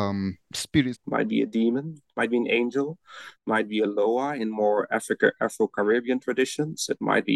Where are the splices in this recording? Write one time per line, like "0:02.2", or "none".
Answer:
0:00.9